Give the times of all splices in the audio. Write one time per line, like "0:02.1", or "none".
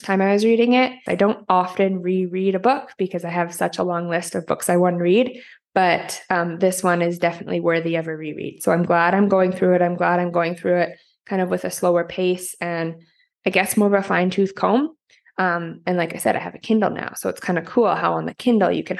0:01.1

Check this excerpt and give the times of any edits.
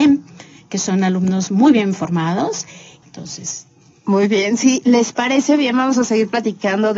0:03.0

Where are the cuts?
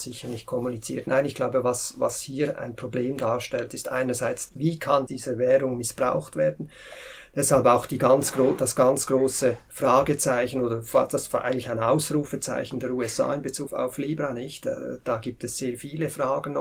0:13.7

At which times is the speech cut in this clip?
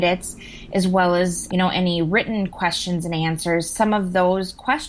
0:01.5

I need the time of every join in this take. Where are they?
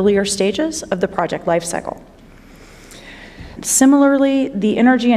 0:03.6

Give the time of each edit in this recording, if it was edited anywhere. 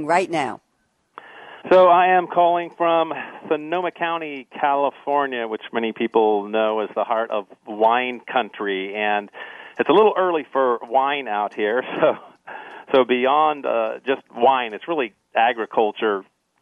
0:01.6

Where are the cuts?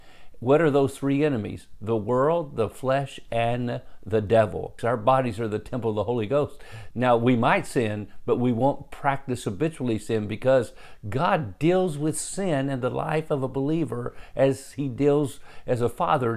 0:04.8
0:06.9

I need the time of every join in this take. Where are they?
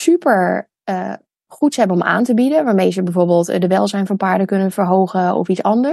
none

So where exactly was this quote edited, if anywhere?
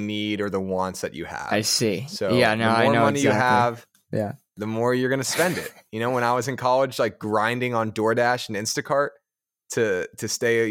none

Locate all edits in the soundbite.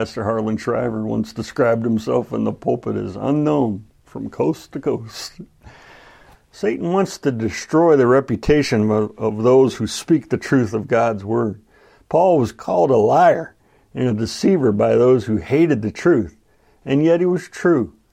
0:06.3

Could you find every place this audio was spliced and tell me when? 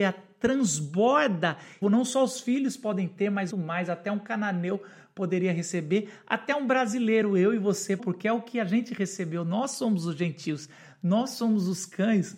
0:01.8
0:03.5
0:08.0

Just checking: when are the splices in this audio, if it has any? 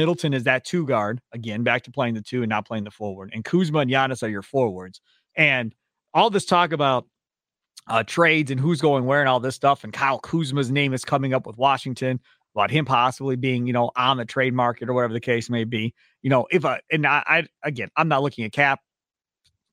0:05.3

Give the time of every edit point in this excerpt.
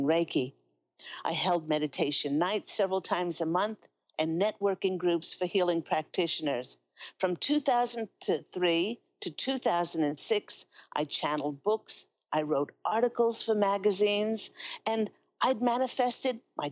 none

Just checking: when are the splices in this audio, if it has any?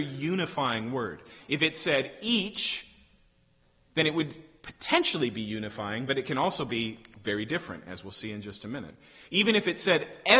none

